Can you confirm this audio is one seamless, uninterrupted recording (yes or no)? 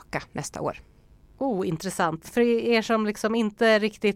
no